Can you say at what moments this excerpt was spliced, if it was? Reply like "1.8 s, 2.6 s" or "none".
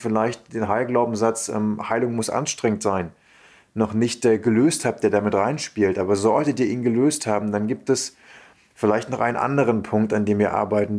none